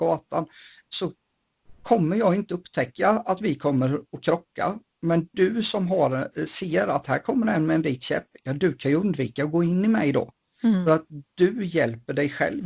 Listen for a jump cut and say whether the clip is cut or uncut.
uncut